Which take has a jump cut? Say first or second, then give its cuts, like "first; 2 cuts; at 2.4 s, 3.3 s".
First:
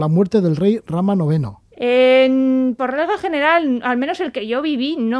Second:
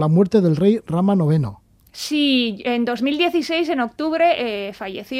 first; 1 cut; at 1.6 s